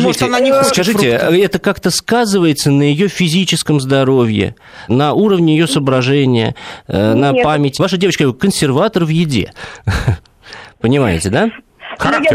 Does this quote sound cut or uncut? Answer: cut